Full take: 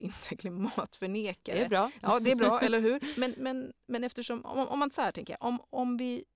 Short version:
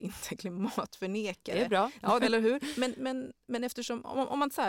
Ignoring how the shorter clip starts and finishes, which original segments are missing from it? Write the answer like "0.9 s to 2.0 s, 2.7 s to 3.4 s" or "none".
2.2 s to 2.6 s